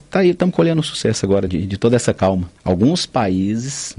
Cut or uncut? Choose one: cut